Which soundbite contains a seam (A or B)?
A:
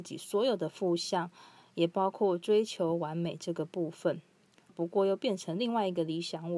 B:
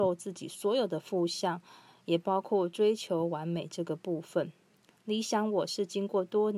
A